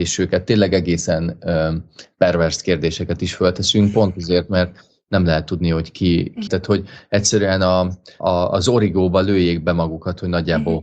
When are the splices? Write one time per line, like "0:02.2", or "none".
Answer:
0:06.5
0:08.2